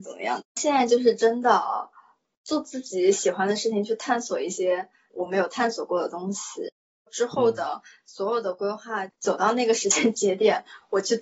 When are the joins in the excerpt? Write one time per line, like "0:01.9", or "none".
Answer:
none